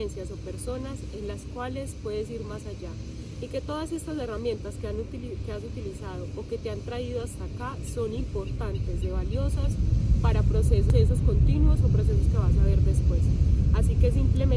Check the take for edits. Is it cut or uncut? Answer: uncut